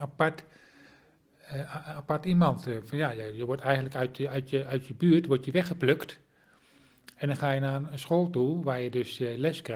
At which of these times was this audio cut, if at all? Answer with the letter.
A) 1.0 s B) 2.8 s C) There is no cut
C